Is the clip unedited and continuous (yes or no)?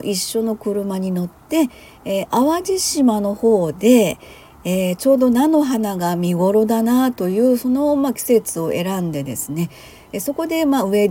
yes